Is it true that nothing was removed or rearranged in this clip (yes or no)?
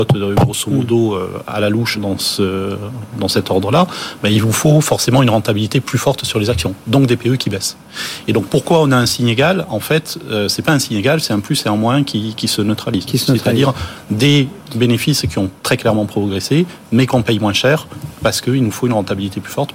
no